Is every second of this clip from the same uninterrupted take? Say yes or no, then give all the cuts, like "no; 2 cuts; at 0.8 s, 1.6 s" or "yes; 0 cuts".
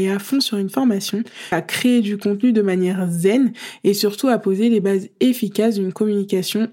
no; 1 cut; at 1.5 s